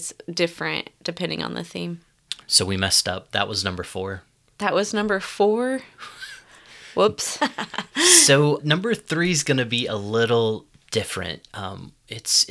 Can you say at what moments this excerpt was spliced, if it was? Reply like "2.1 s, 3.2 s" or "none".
7.4 s, 8.6 s